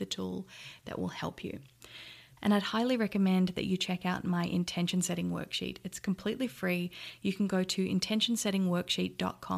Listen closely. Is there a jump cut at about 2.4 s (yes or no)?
yes